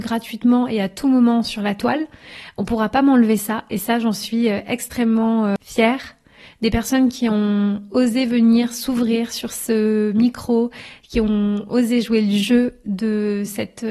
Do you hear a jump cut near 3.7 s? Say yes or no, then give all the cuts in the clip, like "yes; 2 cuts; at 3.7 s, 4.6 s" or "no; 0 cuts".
no; 1 cut; at 6.5 s